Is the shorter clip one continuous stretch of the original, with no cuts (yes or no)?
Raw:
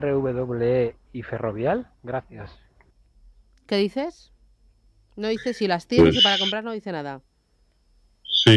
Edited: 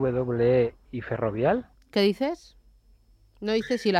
no